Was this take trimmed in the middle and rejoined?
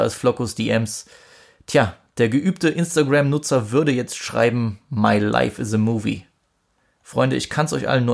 no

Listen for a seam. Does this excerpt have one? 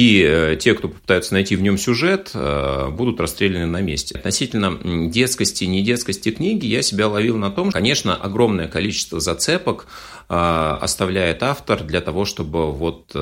yes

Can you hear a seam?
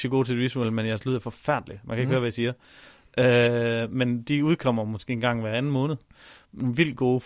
no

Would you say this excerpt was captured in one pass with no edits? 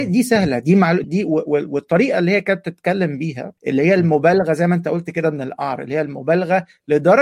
no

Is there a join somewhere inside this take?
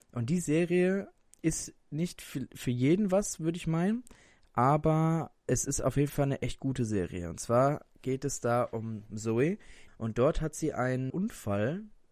yes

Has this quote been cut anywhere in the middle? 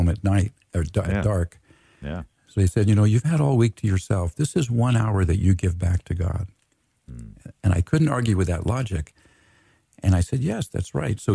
no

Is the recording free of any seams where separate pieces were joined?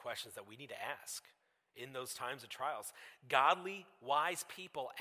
yes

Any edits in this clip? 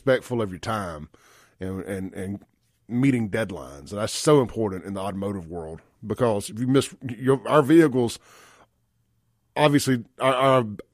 no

